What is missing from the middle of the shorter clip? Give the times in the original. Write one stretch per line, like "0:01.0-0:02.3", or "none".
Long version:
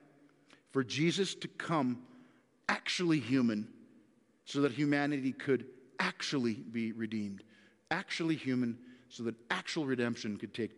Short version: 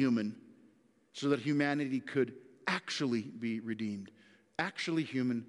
none